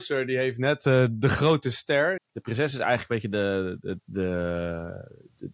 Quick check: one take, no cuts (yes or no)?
no